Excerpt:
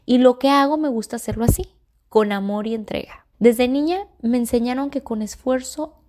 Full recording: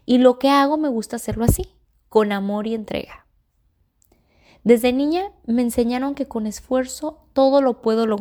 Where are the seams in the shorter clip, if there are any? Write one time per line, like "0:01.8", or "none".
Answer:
0:03.3